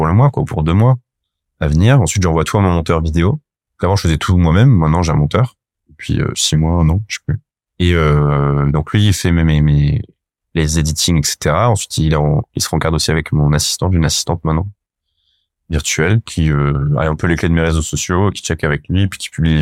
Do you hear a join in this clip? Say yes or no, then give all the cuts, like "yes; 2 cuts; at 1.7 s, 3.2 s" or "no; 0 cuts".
no; 0 cuts